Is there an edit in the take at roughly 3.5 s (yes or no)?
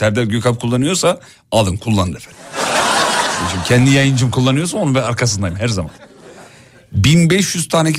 no